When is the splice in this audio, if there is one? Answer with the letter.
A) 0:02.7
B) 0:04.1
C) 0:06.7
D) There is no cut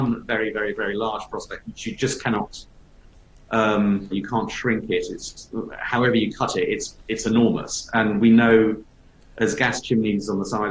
B